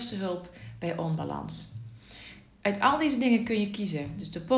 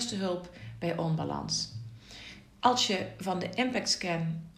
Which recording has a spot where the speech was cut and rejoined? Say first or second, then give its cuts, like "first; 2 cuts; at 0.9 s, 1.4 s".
second; 1 cut; at 2.6 s